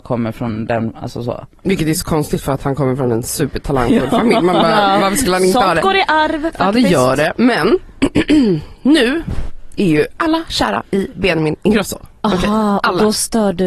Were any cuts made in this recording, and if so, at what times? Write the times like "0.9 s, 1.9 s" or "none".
none